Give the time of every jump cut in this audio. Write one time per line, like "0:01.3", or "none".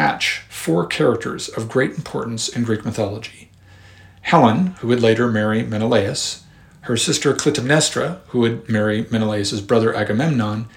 none